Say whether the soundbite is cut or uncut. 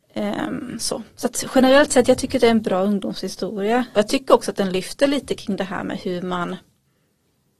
cut